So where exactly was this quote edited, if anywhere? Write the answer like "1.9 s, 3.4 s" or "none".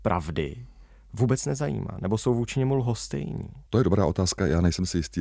3.7 s

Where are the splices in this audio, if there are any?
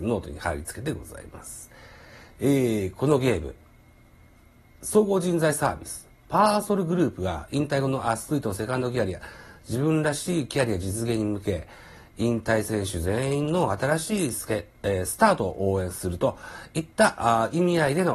none

